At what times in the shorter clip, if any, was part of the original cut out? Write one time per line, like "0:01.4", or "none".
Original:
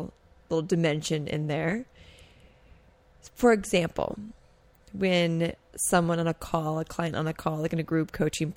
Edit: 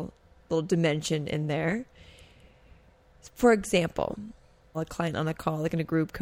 0:04.7